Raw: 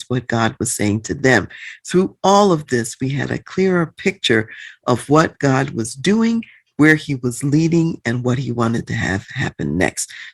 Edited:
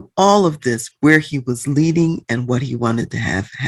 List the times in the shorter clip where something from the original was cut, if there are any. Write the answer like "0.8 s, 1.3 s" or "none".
0.9 s